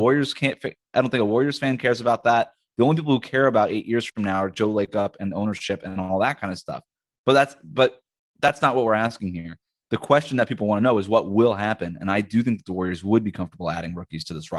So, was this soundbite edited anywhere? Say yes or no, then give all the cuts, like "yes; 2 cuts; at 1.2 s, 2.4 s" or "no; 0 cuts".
no; 0 cuts